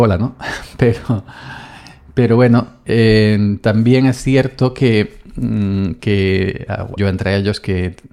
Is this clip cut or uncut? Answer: cut